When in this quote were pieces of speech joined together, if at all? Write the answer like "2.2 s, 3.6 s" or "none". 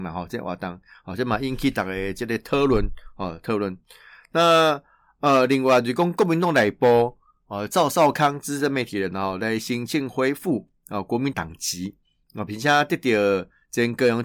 11.3 s